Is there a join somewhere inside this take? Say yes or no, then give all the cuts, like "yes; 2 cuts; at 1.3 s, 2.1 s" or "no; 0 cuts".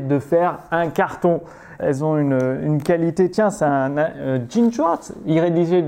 yes; 1 cut; at 1.8 s